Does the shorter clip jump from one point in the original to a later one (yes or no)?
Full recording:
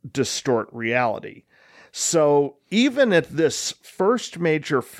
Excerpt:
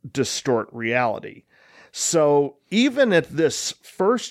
no